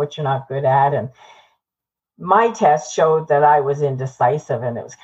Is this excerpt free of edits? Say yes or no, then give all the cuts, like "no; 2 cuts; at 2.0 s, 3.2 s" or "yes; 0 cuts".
yes; 0 cuts